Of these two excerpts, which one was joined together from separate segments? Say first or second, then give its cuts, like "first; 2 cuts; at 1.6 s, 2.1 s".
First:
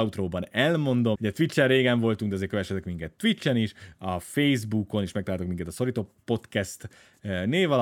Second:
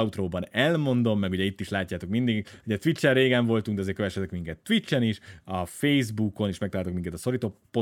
first; 1 cut; at 1.1 s